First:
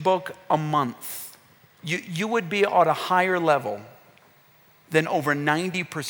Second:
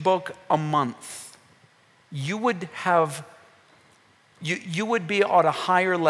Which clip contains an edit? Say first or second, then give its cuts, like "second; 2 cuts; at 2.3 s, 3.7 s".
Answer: first; 1 cut; at 1.7 s